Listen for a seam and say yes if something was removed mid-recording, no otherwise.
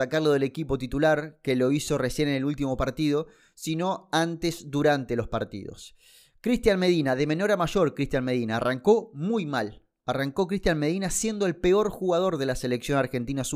no